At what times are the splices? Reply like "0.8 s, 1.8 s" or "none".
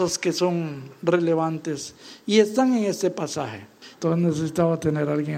3.9 s